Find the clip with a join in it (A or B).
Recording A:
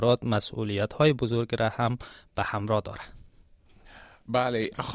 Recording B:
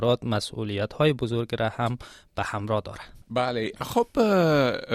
B